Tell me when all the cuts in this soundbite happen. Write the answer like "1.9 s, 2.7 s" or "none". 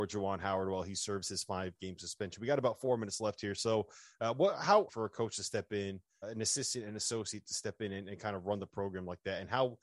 4.9 s, 6.2 s